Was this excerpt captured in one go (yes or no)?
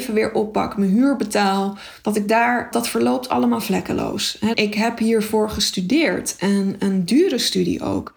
no